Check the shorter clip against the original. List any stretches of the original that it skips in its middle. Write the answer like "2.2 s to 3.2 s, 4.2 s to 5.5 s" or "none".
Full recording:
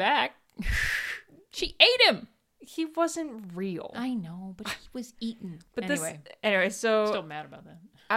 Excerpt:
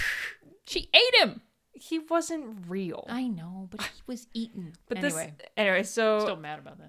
none